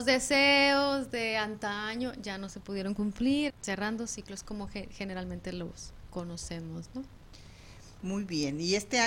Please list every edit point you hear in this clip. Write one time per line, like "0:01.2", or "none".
0:03.5